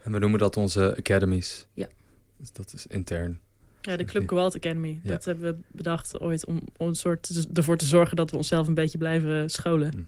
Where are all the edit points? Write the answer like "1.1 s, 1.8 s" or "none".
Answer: none